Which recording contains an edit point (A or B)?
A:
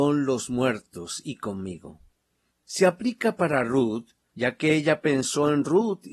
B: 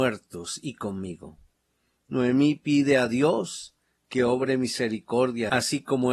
A